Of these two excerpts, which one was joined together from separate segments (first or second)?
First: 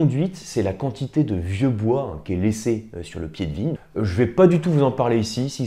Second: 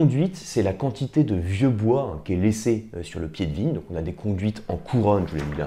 first